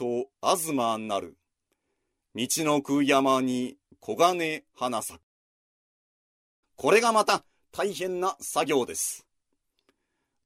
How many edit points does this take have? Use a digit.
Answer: 1